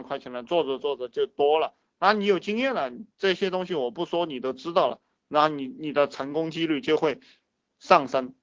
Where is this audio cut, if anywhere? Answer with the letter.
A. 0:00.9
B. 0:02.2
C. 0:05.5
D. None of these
D